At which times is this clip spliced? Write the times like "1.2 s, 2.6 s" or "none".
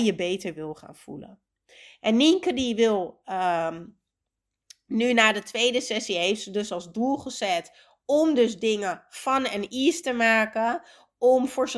none

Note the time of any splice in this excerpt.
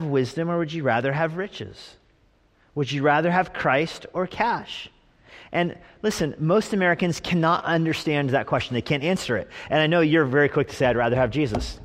none

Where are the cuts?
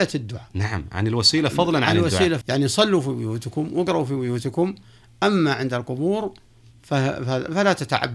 2.4 s

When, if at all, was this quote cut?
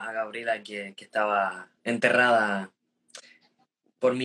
1.8 s

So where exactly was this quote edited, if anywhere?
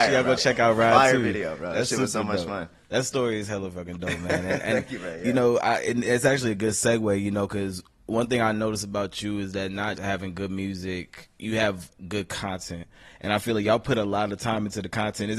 9.9 s

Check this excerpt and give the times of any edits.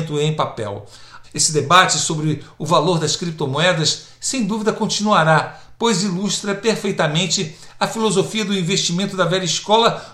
1.2 s

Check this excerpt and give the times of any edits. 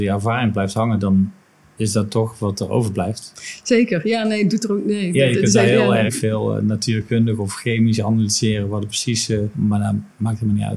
6.1 s

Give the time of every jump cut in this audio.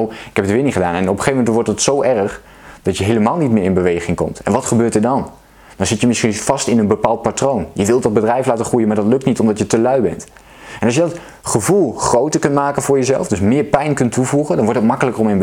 none

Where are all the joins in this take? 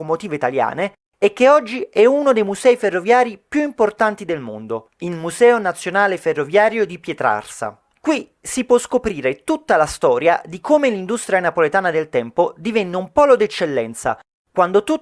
none

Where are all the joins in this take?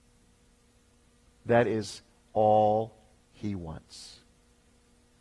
none

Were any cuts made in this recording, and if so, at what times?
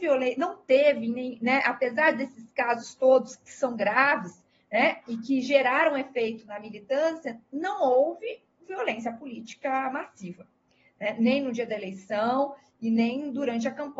none

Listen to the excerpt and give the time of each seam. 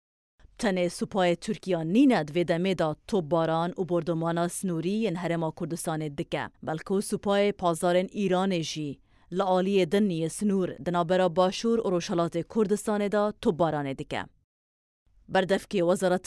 6.5 s

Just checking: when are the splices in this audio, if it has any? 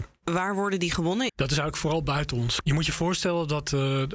1.3 s, 2.6 s

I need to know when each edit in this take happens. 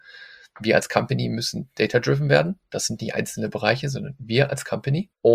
none

